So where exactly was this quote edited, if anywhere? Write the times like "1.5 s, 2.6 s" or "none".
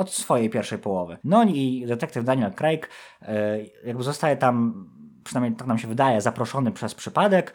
1.2 s